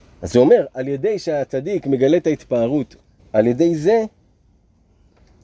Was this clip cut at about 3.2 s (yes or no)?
yes